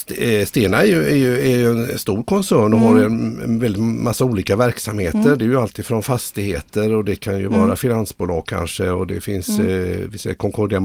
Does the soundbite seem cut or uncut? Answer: uncut